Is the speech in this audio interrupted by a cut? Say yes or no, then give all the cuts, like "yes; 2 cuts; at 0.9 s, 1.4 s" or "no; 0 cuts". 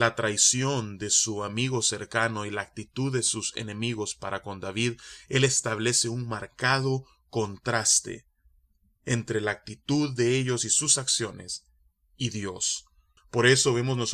yes; 1 cut; at 13.2 s